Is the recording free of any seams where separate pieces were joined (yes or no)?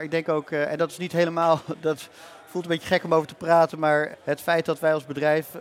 yes